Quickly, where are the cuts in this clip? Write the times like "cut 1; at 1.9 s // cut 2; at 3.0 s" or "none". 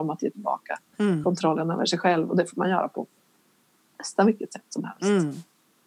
none